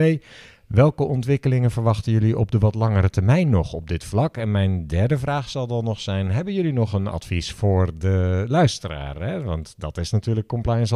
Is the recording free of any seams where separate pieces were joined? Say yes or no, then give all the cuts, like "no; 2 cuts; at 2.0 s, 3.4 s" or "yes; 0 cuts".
yes; 0 cuts